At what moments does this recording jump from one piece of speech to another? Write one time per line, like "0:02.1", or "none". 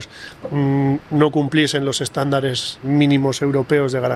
0:02.8